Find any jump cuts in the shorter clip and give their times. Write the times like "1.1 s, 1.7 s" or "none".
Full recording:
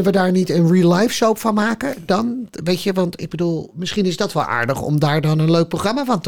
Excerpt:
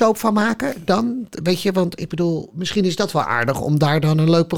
none